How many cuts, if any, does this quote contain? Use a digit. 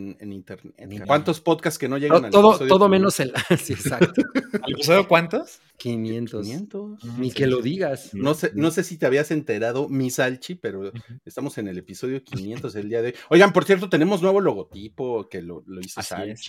2